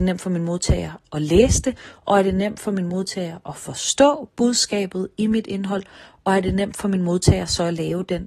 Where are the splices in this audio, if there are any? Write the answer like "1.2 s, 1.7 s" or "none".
none